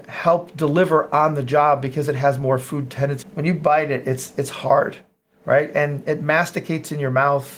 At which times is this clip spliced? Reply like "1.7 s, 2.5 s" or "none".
3.2 s